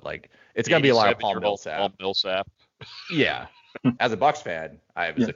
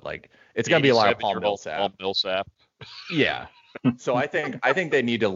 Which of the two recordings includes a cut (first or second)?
first